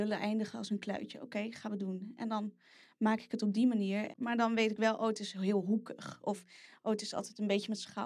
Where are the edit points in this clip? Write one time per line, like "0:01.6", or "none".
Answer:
0:04.1